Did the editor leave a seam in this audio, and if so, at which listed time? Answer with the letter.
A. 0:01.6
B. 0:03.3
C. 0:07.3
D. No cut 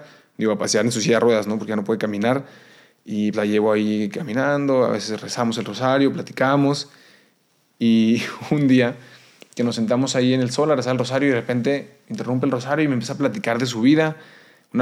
B